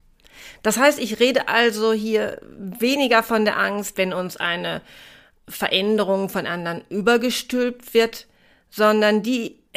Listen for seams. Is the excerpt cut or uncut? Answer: cut